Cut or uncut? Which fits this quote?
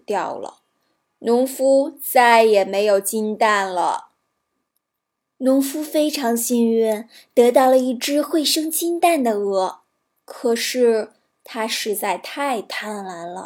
uncut